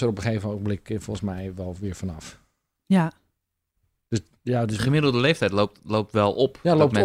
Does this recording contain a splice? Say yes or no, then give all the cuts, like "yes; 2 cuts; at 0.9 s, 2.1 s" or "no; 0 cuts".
no; 0 cuts